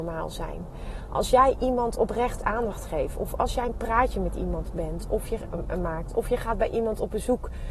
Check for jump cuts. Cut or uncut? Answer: uncut